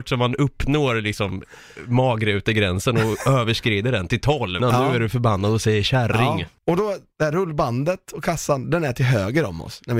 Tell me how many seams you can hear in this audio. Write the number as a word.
one